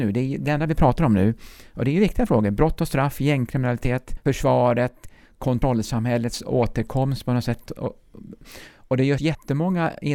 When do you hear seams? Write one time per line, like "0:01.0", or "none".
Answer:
0:07.7